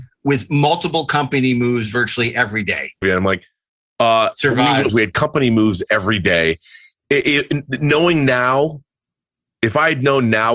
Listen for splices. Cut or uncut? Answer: cut